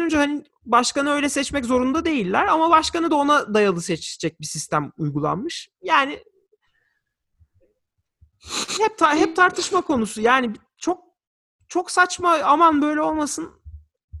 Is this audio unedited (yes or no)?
yes